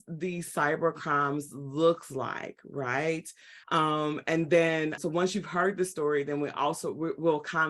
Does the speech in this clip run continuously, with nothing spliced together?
no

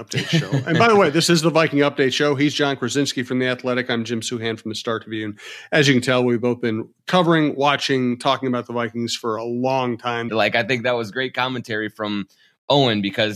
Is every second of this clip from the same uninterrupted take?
no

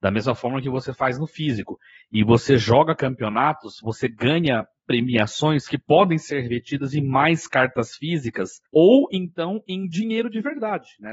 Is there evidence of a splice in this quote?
yes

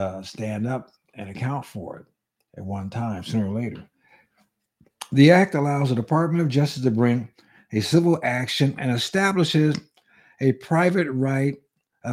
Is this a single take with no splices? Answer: yes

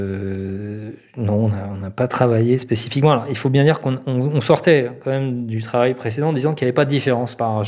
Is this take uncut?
yes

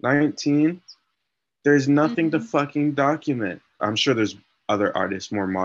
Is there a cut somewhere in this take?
yes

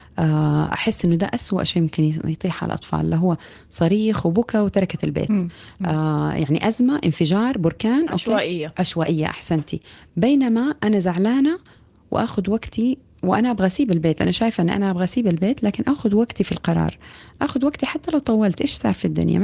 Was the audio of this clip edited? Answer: no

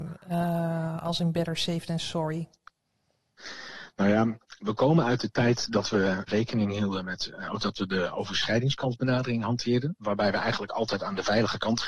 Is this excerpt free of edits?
no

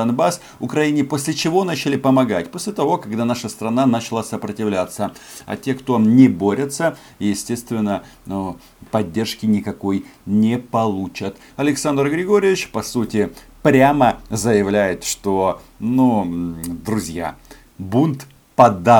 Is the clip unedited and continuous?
no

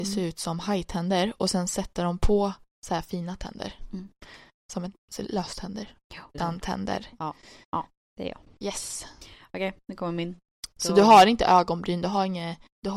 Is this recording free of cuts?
no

